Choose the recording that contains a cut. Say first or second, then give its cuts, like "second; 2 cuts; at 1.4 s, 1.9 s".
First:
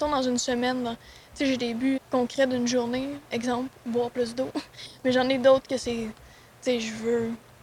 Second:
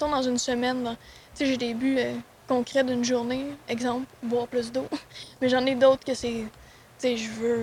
first; 1 cut; at 2.0 s